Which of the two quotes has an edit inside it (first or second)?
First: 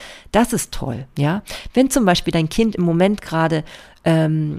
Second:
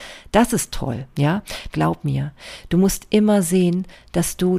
second